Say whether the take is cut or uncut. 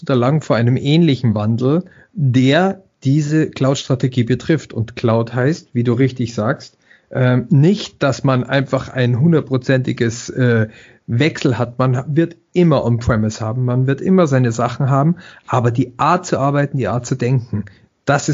uncut